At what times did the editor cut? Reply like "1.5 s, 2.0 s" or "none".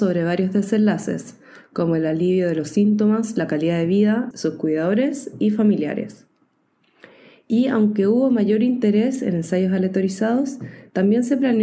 4.3 s